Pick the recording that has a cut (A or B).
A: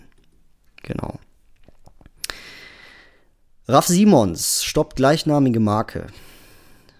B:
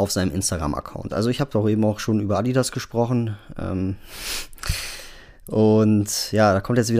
B